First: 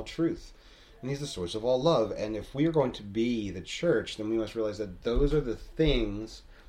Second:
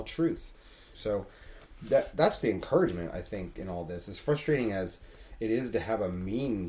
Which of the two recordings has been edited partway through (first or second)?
second